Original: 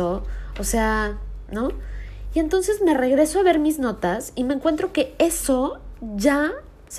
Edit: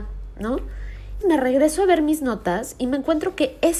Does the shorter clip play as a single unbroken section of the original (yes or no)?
no